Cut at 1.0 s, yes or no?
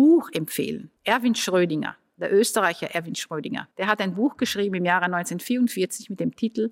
yes